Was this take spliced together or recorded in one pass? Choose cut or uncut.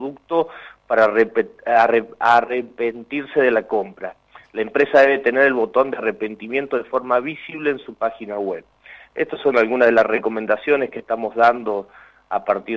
uncut